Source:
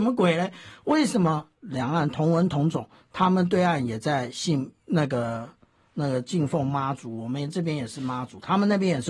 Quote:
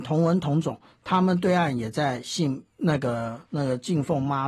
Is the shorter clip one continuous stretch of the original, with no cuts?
no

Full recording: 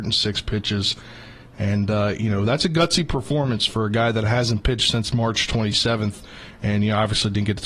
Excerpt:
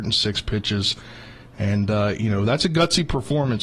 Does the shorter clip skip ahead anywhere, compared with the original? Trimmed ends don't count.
no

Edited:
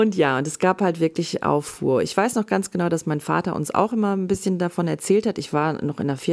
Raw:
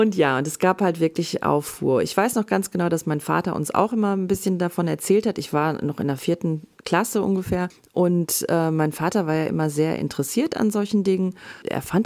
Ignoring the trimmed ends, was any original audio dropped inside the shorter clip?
no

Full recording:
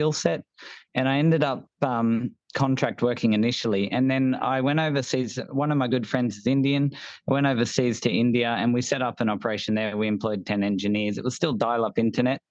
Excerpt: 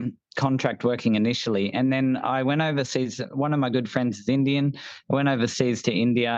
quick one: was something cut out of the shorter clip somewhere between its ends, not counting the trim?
no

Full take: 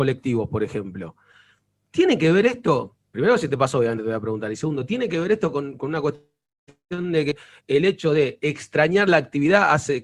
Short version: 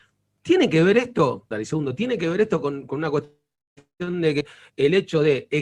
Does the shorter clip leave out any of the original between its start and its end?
yes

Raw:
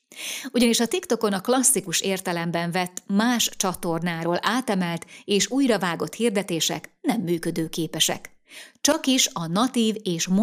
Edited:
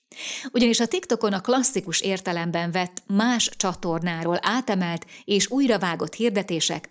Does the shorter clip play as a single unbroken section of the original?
yes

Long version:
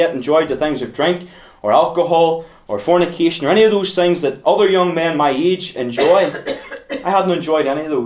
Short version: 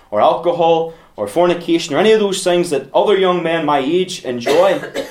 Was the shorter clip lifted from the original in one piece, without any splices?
yes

